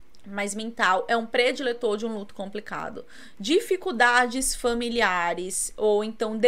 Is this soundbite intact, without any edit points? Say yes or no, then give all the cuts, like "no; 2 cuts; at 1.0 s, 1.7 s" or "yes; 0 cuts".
no; 1 cut; at 3.3 s